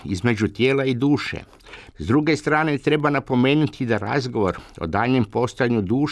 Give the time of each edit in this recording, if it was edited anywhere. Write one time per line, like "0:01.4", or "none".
0:01.9